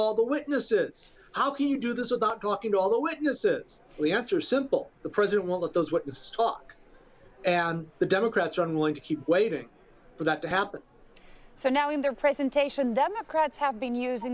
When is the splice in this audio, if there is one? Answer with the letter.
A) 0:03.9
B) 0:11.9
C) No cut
A